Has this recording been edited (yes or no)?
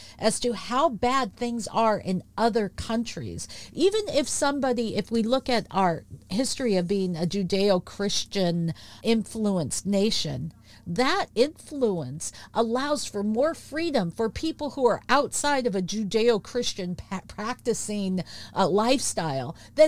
yes